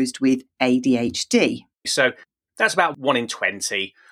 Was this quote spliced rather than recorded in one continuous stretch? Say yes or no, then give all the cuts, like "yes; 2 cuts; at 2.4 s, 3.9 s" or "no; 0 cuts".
yes; 1 cut; at 1.8 s